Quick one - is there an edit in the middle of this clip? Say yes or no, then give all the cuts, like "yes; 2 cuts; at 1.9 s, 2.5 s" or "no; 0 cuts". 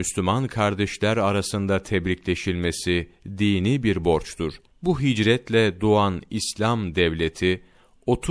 yes; 1 cut; at 4.7 s